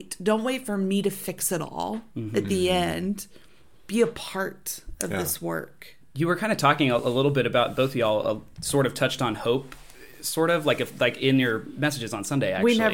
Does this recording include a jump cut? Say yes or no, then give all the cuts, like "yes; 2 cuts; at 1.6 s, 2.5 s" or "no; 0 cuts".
no; 0 cuts